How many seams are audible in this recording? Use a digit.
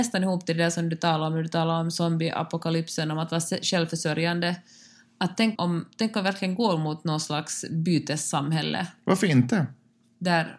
1